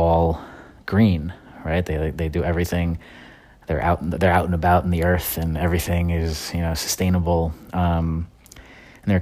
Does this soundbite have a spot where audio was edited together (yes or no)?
no